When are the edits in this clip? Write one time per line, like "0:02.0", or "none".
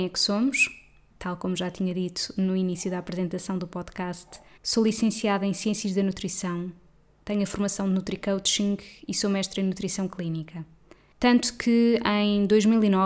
0:01.1
0:04.6
0:11.1